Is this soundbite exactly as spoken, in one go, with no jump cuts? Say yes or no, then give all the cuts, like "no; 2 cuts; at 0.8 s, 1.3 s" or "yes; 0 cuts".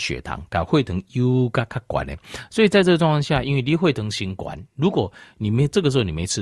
yes; 0 cuts